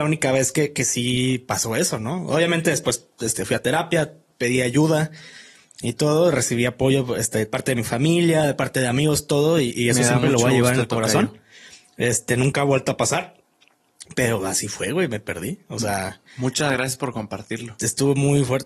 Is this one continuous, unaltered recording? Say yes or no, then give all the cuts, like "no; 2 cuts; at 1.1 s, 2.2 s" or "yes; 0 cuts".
yes; 0 cuts